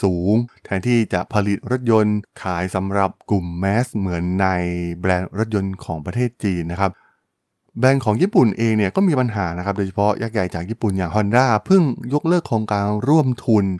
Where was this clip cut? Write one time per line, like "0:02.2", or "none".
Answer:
none